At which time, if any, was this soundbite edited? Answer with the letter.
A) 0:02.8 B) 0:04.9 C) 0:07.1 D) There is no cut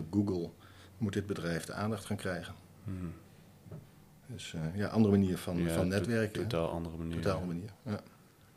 D